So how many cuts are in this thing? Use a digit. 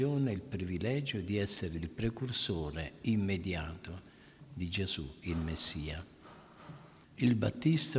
1